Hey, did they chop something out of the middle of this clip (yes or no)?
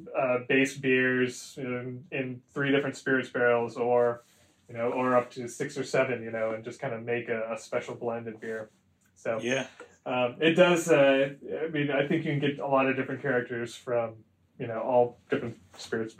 no